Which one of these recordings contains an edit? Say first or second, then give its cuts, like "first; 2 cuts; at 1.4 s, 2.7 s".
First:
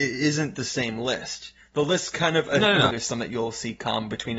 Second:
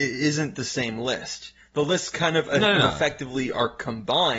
first; 1 cut; at 2.9 s